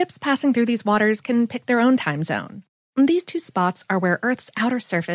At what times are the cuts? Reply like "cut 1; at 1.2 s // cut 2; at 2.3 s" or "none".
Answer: cut 1; at 2.8 s